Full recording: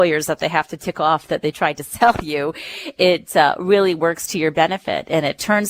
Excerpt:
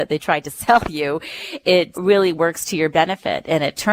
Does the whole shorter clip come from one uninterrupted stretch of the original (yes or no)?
no